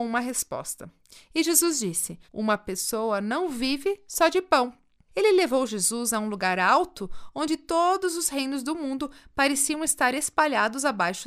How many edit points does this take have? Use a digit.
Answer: 2